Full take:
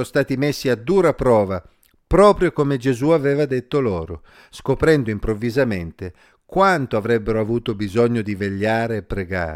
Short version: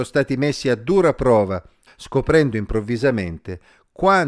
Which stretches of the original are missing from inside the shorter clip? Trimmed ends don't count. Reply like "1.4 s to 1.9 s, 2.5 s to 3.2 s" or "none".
1.9 s to 4.4 s